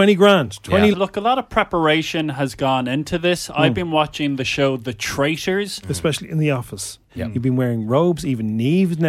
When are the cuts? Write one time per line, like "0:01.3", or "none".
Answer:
0:00.9
0:05.8
0:07.1